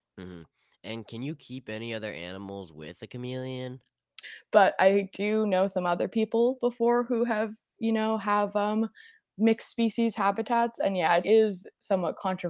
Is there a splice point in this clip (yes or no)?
yes